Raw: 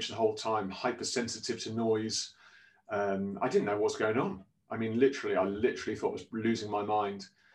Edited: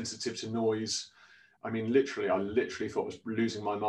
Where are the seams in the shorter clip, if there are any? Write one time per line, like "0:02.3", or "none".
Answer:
0:01.6

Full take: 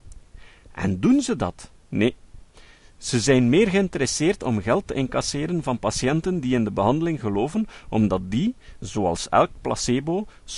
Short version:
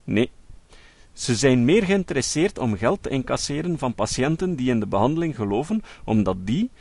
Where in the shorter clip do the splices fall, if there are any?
none

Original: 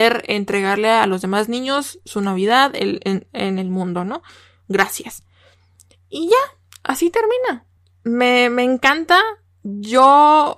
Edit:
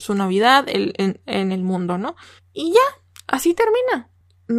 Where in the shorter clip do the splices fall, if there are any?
0:02.4

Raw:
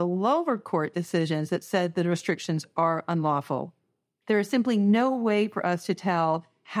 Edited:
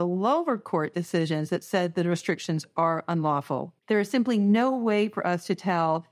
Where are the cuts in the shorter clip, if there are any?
0:03.8

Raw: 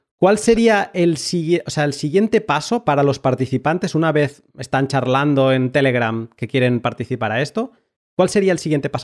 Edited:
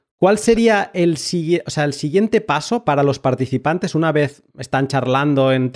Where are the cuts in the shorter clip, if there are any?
none

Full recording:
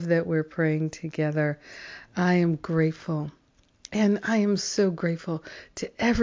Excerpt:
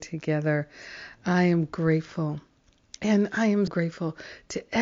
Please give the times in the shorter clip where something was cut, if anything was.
0:03.7

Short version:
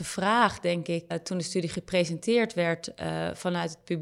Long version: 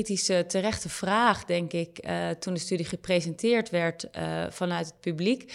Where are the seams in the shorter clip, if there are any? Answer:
0:01.1

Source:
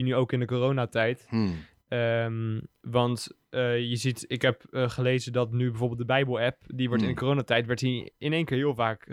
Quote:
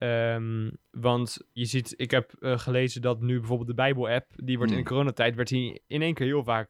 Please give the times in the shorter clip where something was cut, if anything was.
0:01.6

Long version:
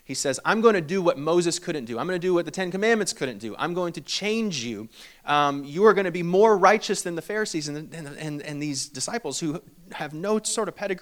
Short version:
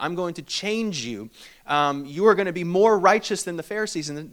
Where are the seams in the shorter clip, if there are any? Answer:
none

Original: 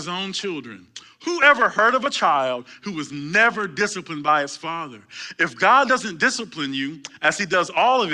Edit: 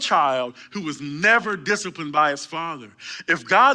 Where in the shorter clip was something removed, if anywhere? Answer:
none

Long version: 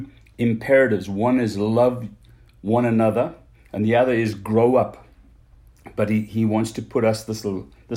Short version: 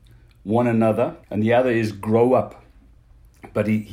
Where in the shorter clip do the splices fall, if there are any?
0:01.2

